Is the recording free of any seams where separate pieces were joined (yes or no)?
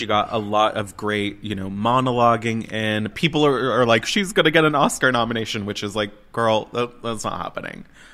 yes